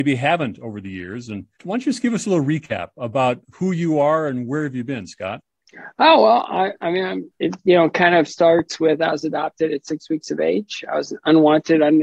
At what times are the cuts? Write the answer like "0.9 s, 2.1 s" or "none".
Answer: 1.5 s